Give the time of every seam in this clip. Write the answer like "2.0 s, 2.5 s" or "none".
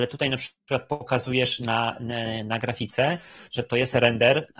none